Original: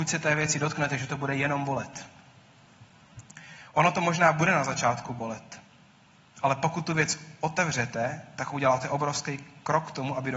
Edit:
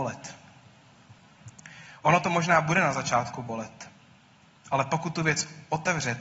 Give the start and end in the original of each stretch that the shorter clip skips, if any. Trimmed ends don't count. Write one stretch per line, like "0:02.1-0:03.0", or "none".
none